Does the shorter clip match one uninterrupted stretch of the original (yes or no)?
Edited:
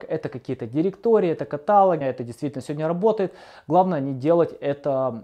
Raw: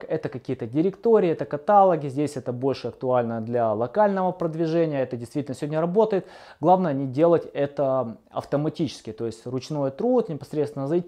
no